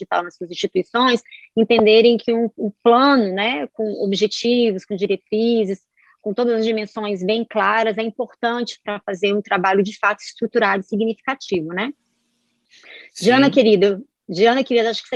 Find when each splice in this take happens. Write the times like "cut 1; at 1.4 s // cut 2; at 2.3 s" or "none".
none

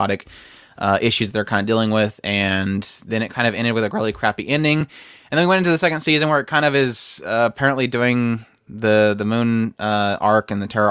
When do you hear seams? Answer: none

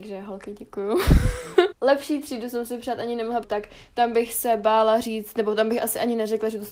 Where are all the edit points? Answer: cut 1; at 1.7 s // cut 2; at 3.4 s

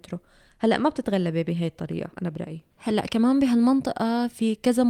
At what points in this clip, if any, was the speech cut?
cut 1; at 2.1 s

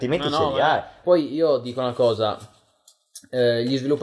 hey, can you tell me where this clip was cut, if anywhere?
cut 1; at 1.0 s

